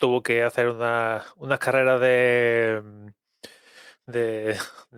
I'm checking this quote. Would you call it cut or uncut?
uncut